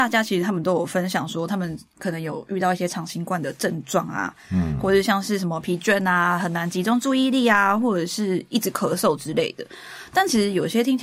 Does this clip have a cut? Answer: no; 0 cuts

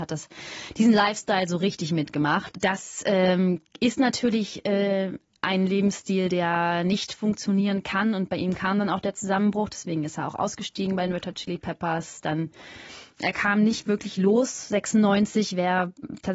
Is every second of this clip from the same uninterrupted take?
no; 1 cut; at 2.5 s

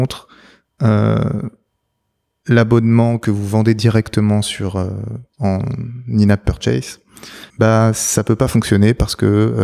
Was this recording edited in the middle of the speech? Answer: yes; 1 cut; at 7.5 s

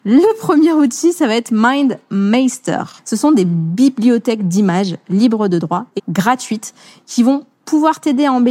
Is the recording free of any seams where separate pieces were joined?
no; 2 cuts; at 3.0 s, 6.0 s

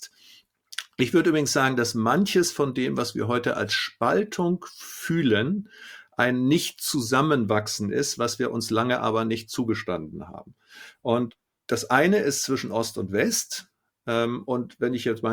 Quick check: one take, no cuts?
yes; 0 cuts

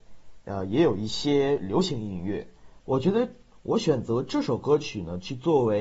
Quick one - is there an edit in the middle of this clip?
yes; 1 cut; at 2.8 s

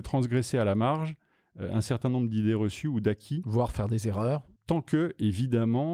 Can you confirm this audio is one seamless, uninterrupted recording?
no; 1 cut; at 4.6 s

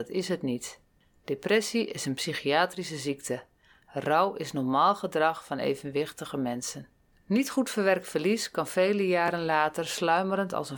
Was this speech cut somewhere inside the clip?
no; 0 cuts

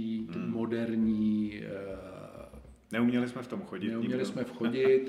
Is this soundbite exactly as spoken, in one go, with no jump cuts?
yes; 0 cuts

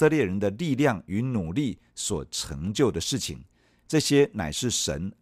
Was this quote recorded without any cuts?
yes; 0 cuts

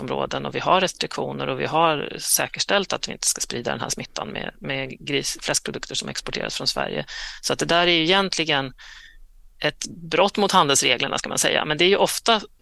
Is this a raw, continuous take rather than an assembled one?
yes; 0 cuts

